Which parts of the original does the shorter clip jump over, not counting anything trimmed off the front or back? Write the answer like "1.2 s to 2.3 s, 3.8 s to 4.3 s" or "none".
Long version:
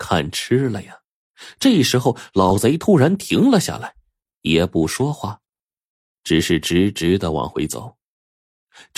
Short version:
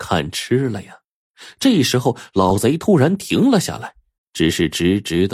4.2 s to 6.1 s